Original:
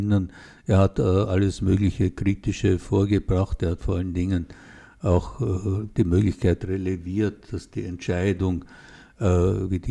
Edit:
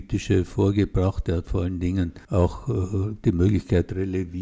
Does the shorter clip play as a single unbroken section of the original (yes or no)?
no